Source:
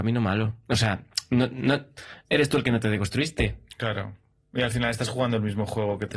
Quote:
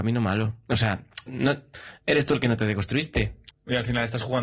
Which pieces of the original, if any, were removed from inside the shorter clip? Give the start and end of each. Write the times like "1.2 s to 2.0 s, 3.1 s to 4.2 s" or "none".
1.3 s to 1.5 s, 3.7 s to 4.4 s